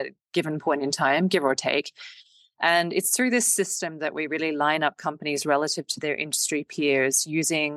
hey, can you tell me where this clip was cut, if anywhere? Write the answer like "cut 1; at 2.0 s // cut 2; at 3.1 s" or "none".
none